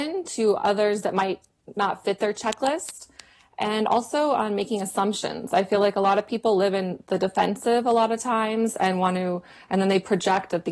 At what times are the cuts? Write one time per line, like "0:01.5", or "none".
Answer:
none